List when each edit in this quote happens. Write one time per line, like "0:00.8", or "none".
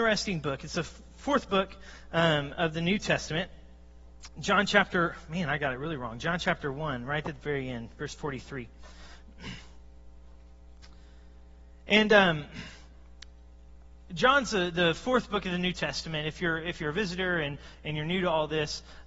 none